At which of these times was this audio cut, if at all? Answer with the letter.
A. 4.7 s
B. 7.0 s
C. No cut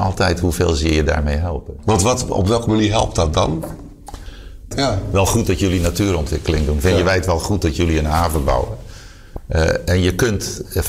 A